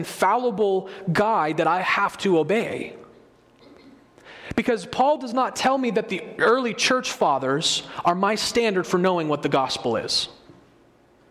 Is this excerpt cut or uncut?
uncut